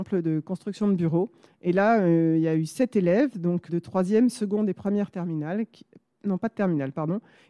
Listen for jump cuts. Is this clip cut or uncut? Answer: cut